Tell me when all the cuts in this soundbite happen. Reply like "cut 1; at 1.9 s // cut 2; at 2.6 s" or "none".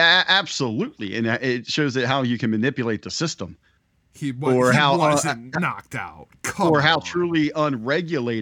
none